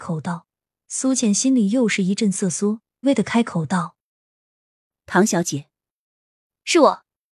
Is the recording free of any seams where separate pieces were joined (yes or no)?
no